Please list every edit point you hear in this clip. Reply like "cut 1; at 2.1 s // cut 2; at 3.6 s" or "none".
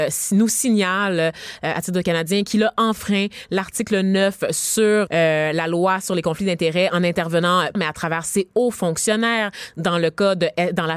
cut 1; at 5.1 s // cut 2; at 7.7 s